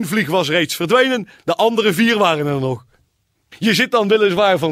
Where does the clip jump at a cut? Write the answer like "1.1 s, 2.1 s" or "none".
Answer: 3.5 s